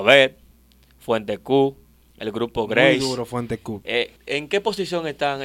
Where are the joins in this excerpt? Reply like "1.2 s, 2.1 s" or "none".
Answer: 4.2 s